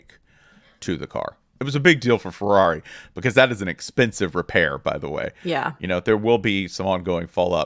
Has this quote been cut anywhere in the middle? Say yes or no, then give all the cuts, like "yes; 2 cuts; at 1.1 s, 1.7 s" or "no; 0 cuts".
yes; 1 cut; at 1.6 s